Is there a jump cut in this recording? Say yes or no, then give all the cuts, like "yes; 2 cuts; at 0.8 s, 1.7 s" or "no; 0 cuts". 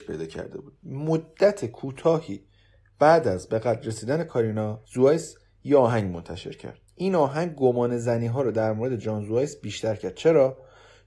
yes; 2 cuts; at 4.8 s, 6.9 s